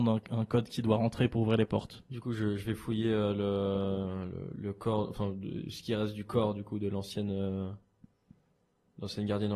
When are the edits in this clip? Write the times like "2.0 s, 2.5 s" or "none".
none